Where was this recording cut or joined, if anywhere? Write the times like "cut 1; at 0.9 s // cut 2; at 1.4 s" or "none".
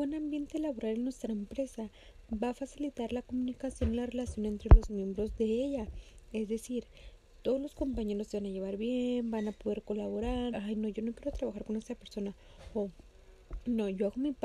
cut 1; at 10.5 s